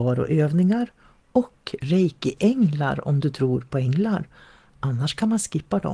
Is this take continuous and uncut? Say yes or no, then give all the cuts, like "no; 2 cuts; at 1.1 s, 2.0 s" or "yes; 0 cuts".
yes; 0 cuts